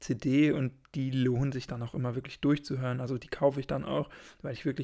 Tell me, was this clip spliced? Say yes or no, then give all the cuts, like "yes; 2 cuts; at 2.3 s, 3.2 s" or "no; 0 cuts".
no; 0 cuts